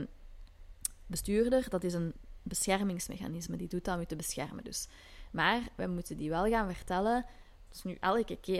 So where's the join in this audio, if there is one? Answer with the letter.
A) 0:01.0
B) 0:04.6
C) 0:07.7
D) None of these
C